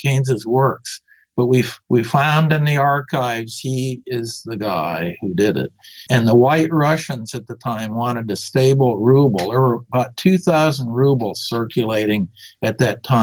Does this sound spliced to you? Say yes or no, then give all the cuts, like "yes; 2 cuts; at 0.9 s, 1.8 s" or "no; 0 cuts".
yes; 2 cuts; at 1.8 s, 6.1 s